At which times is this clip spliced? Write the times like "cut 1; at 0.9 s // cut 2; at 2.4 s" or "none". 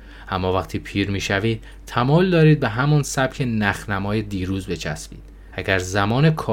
cut 1; at 5.5 s